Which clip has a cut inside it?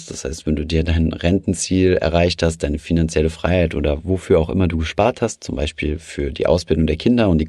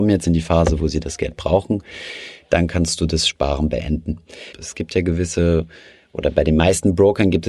second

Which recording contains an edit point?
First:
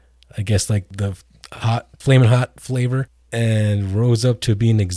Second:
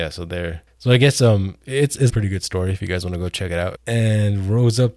second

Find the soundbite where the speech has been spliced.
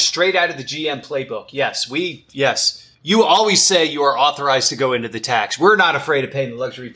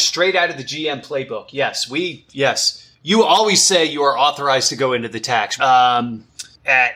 second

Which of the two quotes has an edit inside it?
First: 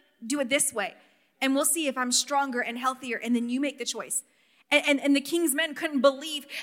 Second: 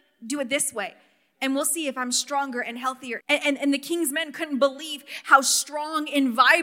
second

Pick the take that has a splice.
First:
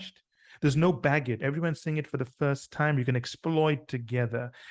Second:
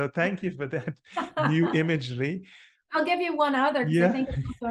first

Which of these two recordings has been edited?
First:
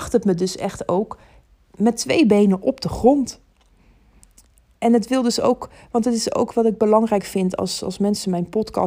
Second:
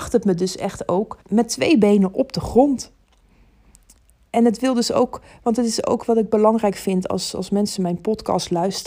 second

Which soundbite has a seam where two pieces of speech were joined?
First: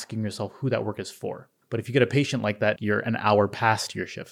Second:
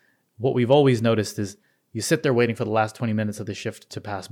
first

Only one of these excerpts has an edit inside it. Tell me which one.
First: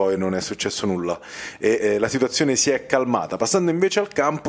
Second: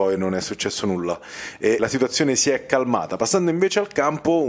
second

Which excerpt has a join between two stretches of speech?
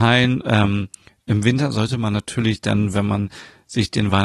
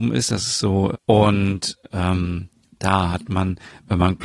second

